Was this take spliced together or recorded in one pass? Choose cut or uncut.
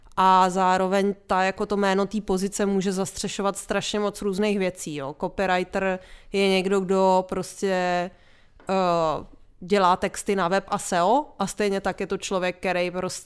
uncut